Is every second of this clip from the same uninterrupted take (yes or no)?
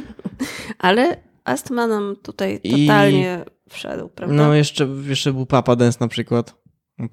yes